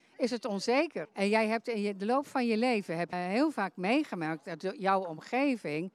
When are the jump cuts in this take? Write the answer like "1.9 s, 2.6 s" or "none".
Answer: 1.0 s, 3.1 s